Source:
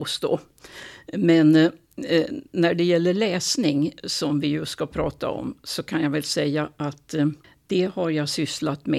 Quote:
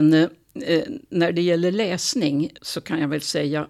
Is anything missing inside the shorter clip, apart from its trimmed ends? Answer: yes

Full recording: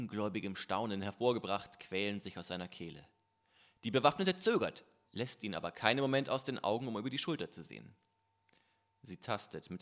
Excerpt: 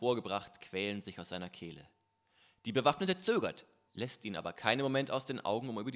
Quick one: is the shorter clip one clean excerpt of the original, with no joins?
yes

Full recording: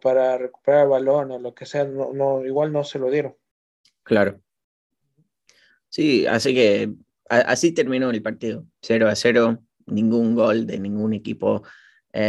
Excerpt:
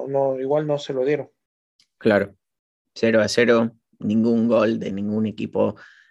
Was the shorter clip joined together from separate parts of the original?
yes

